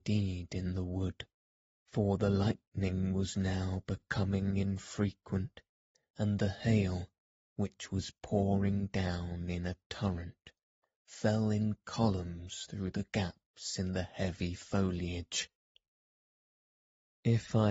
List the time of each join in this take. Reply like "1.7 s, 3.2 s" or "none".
none